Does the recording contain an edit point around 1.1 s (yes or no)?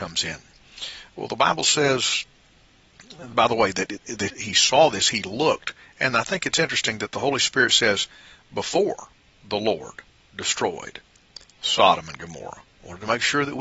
no